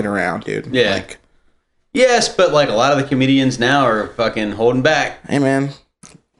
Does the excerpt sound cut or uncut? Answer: uncut